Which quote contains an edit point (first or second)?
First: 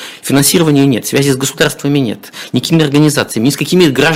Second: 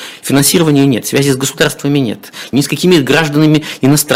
second